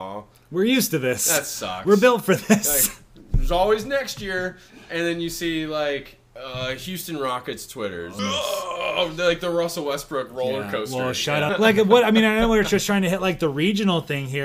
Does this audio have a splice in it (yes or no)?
yes